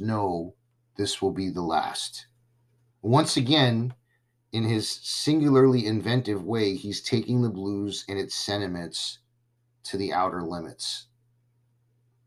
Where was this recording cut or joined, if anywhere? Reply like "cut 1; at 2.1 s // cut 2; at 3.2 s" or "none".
cut 1; at 2.9 s